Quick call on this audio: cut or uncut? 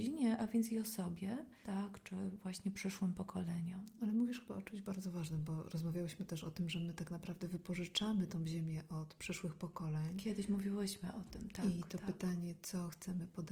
cut